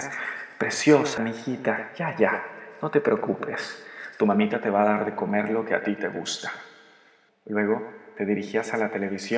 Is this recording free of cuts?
no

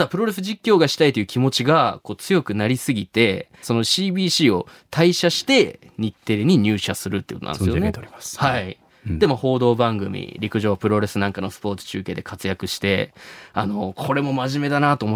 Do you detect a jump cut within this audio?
yes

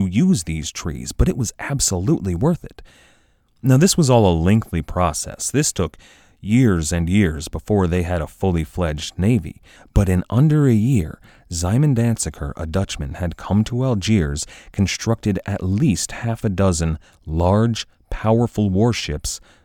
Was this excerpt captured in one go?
yes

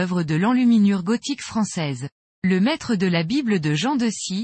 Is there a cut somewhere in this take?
yes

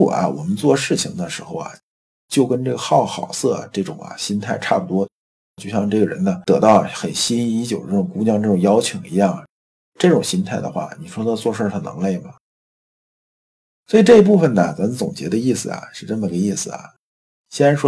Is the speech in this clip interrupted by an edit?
no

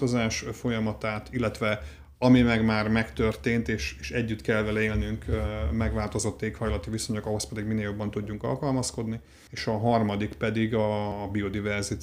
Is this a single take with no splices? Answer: yes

